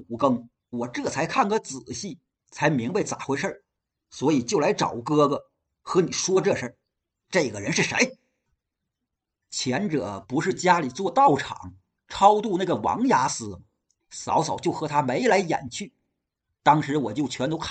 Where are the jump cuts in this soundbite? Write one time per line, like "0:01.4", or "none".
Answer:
0:07.2
0:14.0